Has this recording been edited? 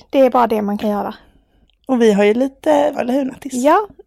yes; 2 cuts; at 1.7 s, 2.9 s

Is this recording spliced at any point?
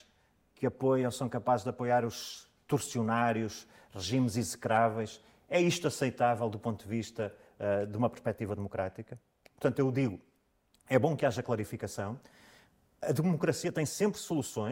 no; 0 cuts

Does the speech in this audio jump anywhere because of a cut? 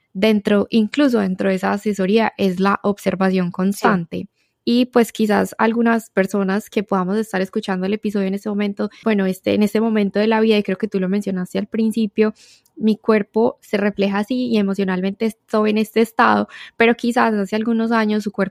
yes; 2 cuts; at 4.6 s, 9.0 s

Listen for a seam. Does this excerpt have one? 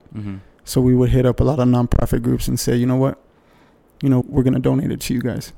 yes; 1 cut; at 4.2 s

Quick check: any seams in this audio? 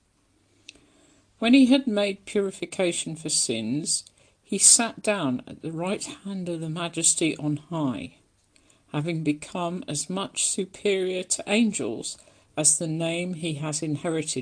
no; 0 cuts

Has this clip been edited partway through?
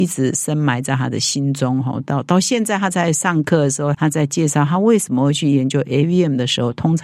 yes; 1 cut; at 3.9 s

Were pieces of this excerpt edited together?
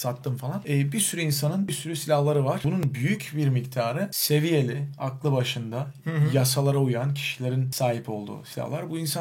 no; 0 cuts

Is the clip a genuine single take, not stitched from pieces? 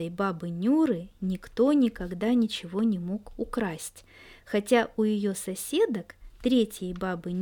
yes; 0 cuts

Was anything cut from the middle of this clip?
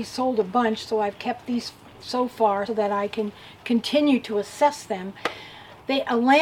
yes; 1 cut; at 2.7 s

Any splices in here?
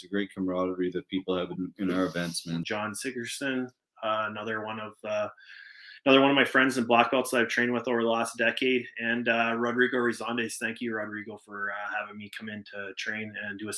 yes; 1 cut; at 2.6 s

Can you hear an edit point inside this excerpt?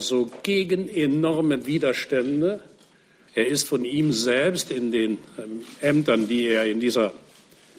yes; 1 cut; at 3.3 s

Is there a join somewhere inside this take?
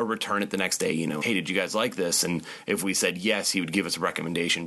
yes; 1 cut; at 1.2 s

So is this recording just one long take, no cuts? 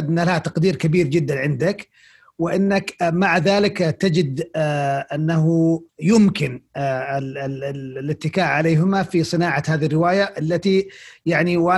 no; 1 cut; at 5.9 s

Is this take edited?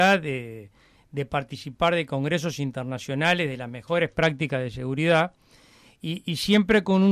no; 0 cuts

